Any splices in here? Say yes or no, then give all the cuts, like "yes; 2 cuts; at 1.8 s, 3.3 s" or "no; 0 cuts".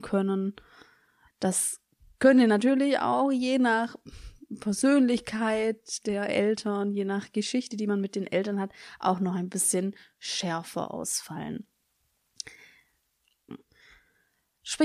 yes; 2 cuts; at 1.3 s, 13.5 s